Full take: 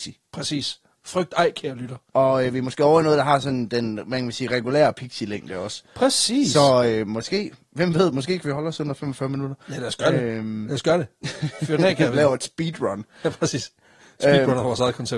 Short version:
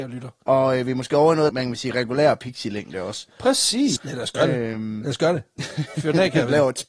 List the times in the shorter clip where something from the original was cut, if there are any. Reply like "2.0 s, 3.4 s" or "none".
1.5 s, 4.0 s

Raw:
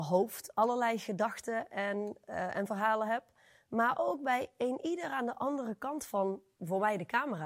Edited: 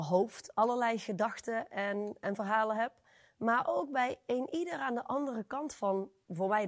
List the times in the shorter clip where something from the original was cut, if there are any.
2.2 s

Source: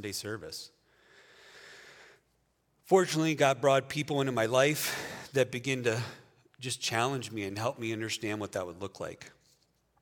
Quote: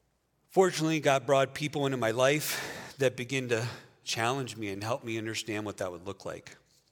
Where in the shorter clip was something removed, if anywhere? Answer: 4.0 s

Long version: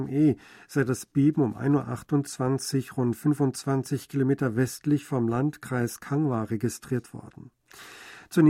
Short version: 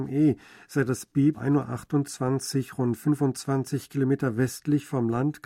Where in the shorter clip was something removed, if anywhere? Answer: 1.3 s

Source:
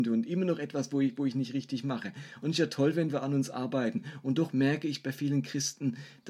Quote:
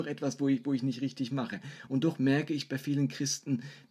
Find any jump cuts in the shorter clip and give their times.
1.9 s

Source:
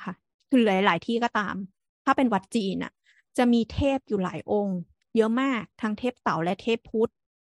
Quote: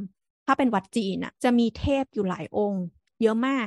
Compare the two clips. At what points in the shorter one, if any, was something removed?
1.4 s

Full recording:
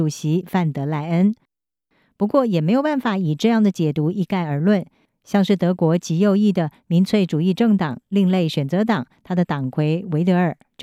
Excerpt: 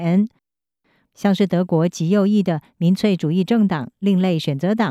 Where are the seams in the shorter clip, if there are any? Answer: 1.0 s

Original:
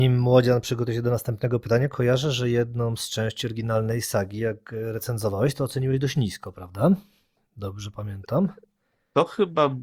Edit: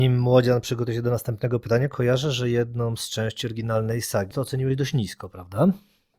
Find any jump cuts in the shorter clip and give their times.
4.3 s

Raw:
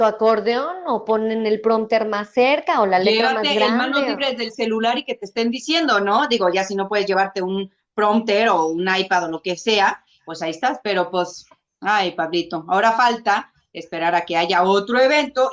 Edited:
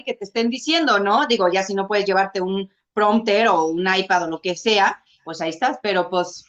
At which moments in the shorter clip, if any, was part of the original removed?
none

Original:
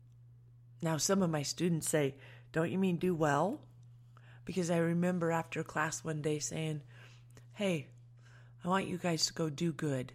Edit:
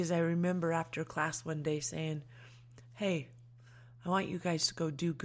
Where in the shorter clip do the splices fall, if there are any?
none

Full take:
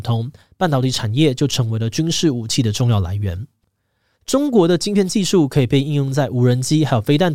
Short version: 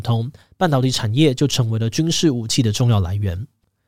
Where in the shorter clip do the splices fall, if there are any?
none

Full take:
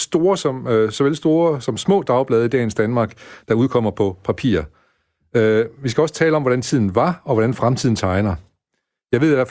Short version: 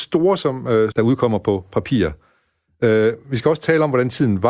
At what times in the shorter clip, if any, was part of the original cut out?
0.9 s

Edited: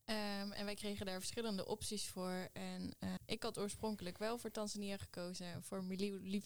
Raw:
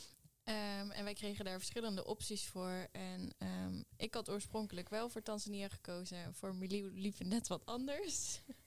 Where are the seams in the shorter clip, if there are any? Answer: 3.2 s

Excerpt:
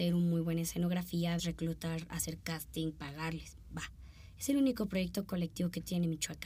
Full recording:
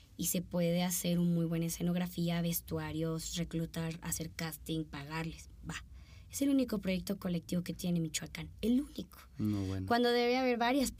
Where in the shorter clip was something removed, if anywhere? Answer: 1.4 s

